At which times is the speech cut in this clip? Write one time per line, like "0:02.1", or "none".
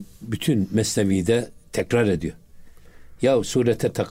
0:03.2